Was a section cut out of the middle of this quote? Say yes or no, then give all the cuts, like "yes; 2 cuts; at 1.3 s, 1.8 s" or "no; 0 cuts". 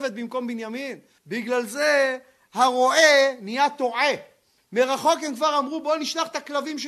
yes; 2 cuts; at 1.2 s, 4.6 s